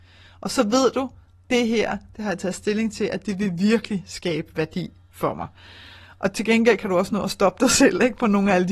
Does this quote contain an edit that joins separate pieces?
no; 0 cuts

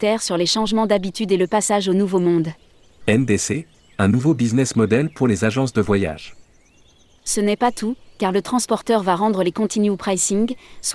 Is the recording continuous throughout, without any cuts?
no; 2 cuts; at 3.0 s, 7.2 s

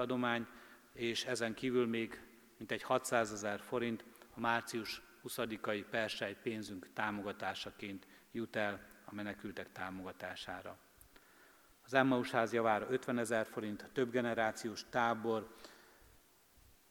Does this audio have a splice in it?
no; 0 cuts

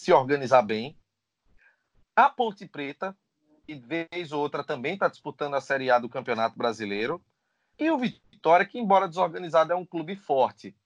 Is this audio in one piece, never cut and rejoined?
yes; 0 cuts

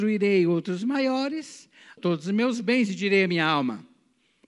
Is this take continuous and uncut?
no; 1 cut; at 2.0 s

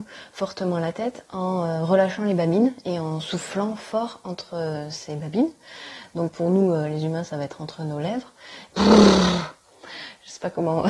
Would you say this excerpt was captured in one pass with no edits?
no; 1 cut; at 8.7 s

